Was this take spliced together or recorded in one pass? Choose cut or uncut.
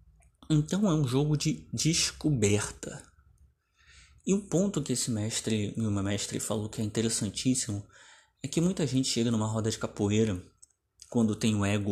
uncut